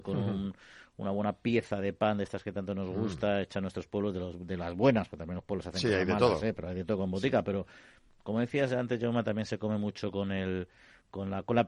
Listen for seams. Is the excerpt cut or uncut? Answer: uncut